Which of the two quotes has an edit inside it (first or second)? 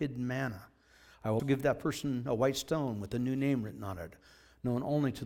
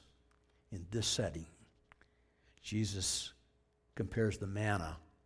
first